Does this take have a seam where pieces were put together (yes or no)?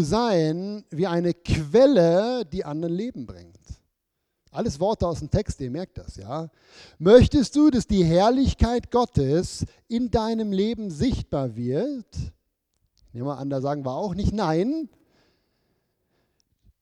no